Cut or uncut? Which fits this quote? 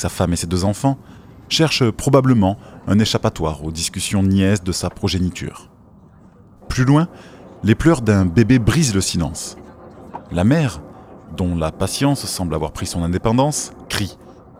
uncut